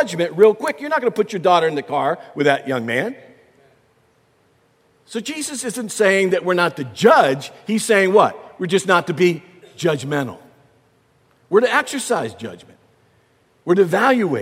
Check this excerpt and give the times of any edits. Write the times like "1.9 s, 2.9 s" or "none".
none